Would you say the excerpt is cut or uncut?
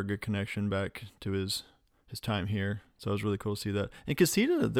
uncut